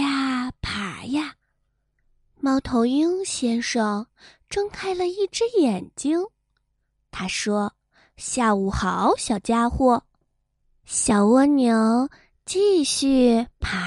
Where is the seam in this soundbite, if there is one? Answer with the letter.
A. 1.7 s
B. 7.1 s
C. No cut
A